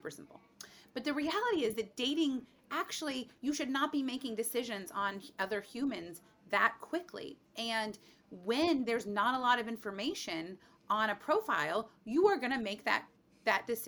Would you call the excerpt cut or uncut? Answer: uncut